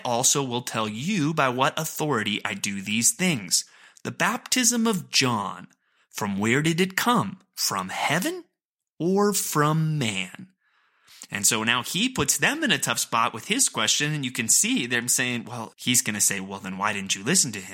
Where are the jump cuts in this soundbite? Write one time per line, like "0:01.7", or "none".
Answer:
0:15.7